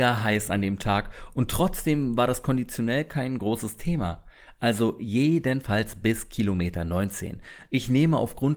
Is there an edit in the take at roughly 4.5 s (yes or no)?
no